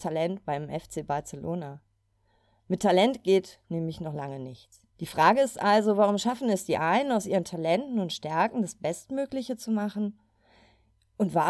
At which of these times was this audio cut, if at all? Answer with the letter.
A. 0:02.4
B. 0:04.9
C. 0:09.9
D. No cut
B